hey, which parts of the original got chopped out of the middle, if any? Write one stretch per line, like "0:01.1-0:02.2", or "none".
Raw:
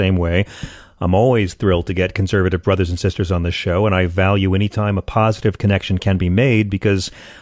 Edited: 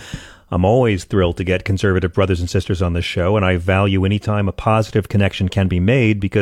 none

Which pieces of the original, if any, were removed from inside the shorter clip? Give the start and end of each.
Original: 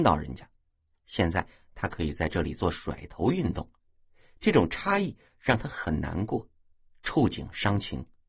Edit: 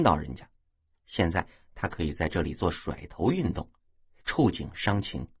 0:04.2-0:07.0

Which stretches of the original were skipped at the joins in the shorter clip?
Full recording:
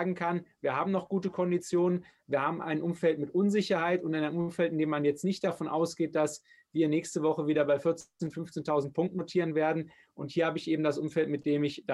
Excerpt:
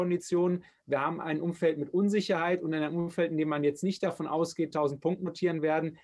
0:06.1-0:08.6

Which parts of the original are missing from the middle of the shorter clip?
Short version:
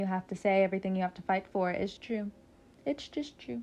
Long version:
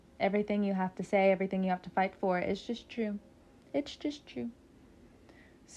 0:02.6-0:02.8

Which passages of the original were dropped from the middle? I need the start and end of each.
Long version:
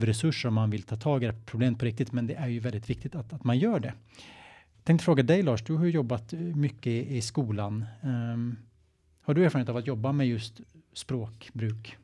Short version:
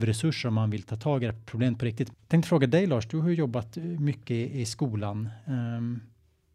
0:02.1-0:04.7

